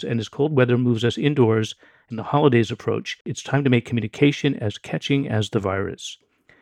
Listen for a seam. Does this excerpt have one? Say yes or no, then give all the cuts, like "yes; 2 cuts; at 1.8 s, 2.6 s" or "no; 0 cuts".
no; 0 cuts